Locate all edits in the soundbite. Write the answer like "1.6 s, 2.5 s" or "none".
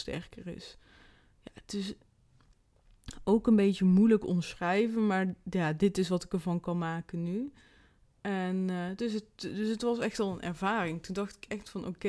none